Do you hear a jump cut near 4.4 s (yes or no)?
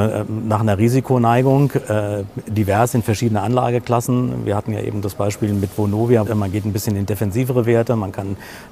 no